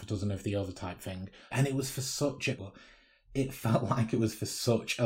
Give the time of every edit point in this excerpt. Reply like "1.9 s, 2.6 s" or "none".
1.5 s, 2.6 s